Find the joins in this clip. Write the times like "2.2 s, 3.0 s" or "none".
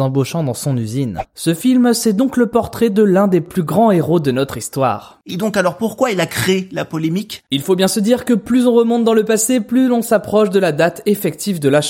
none